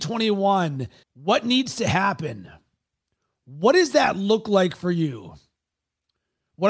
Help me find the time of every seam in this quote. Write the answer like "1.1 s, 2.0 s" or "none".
1.0 s